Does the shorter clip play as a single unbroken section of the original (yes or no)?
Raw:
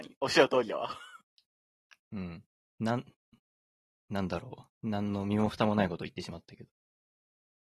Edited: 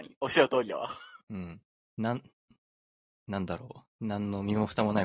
no